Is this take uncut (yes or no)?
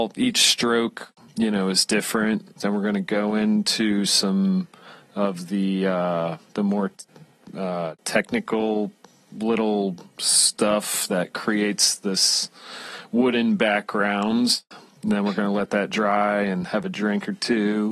no